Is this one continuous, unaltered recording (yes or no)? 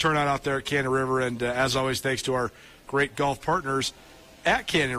yes